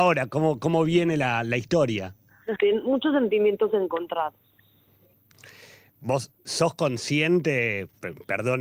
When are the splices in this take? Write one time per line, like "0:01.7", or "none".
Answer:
0:02.6